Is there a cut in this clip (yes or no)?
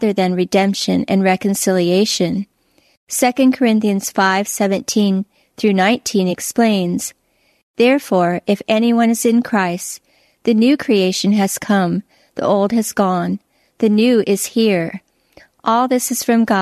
no